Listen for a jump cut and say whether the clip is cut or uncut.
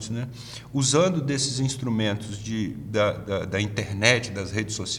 uncut